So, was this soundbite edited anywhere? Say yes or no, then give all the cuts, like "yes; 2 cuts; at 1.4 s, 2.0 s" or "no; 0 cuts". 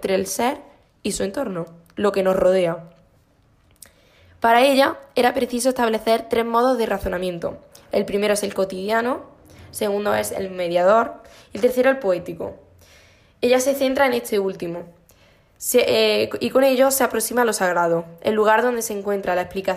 no; 0 cuts